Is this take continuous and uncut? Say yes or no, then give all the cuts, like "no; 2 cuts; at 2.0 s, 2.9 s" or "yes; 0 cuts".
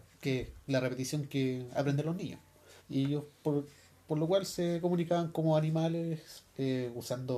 no; 1 cut; at 2.8 s